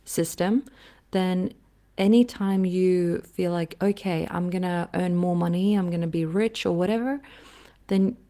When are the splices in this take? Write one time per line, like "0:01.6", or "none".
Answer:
none

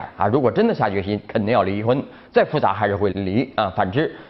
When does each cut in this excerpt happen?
0:03.1

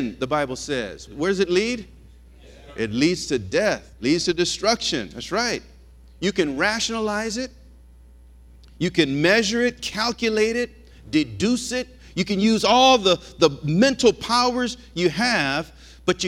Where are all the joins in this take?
0:01.1

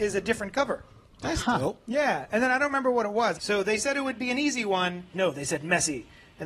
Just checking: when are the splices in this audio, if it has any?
0:03.3
0:05.1

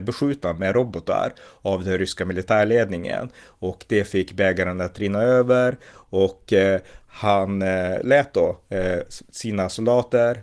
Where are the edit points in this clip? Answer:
none

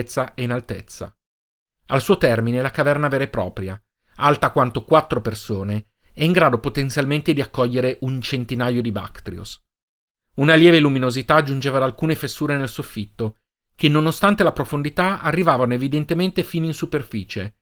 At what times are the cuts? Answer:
none

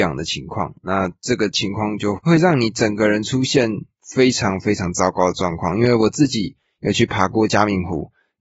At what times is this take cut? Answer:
0:02.2

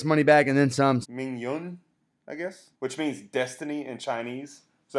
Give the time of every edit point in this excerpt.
0:01.0
0:02.7

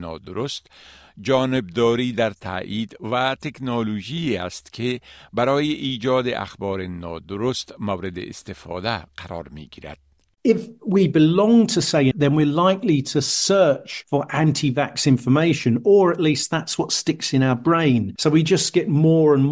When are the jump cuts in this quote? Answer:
0:12.1
0:18.2

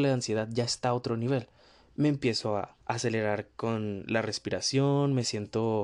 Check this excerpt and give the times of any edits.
0:02.8

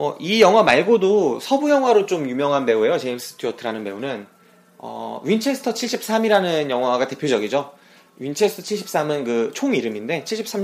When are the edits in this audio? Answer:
none

